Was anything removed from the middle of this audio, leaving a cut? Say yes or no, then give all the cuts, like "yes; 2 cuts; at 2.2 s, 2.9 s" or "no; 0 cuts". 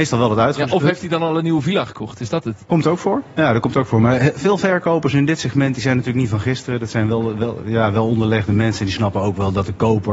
no; 0 cuts